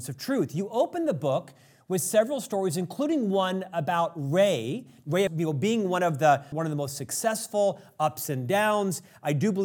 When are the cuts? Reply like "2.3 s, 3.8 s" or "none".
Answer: 5.3 s, 6.5 s